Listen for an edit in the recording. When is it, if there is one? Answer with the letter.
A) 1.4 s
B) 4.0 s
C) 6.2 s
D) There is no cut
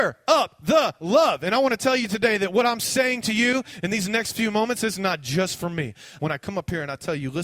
C